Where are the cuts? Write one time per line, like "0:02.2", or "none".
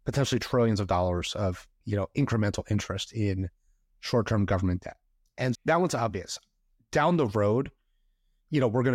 0:05.5